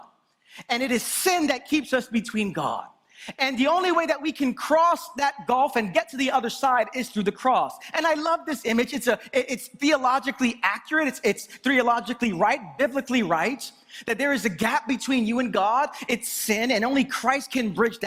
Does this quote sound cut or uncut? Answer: uncut